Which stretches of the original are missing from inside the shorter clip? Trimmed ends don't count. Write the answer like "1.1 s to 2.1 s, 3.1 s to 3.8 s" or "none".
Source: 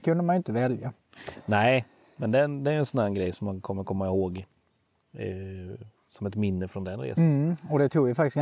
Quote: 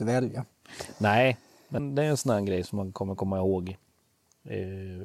2.3 s to 2.5 s